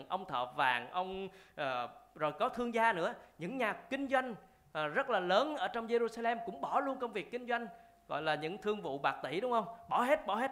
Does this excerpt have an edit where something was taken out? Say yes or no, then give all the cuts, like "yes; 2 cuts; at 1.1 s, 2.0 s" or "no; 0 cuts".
no; 0 cuts